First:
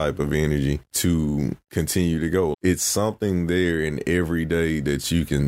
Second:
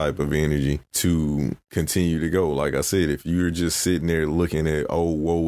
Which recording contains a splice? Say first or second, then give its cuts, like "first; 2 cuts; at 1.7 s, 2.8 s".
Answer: first; 1 cut; at 2.5 s